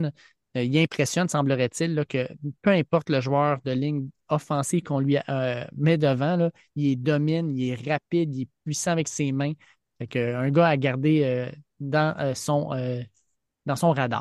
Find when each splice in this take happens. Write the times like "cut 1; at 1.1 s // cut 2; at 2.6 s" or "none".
none